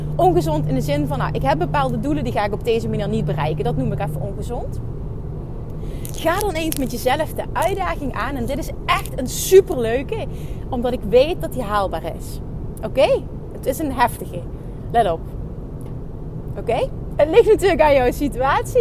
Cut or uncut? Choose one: cut